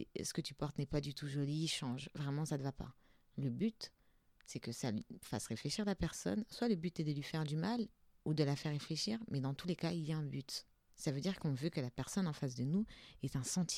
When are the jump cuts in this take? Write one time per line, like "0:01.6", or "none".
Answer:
0:10.9